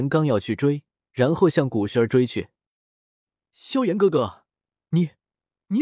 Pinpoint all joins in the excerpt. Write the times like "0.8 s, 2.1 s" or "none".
1.0 s, 3.4 s